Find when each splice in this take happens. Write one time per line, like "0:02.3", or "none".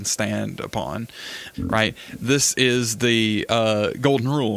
0:01.5